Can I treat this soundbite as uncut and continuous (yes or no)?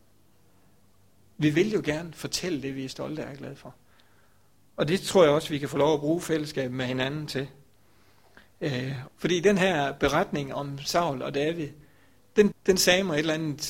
no